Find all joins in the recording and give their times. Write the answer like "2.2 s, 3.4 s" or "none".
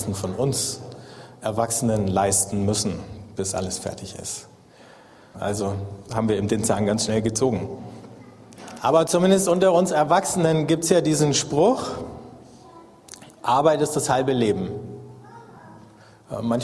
5.3 s, 8.8 s